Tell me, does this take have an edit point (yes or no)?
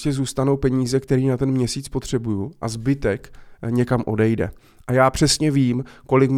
no